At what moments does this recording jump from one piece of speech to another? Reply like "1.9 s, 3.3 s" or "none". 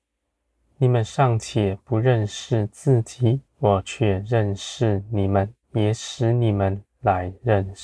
3.5 s, 5.6 s

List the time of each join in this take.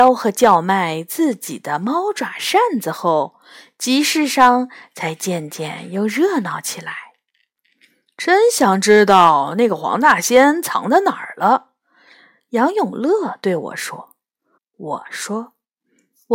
14.6 s

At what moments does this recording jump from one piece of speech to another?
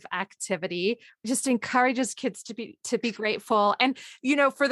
none

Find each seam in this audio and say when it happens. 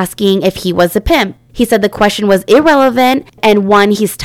none

